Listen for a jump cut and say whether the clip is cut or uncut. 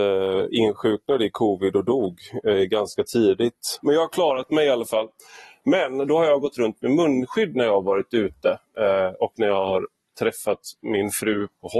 cut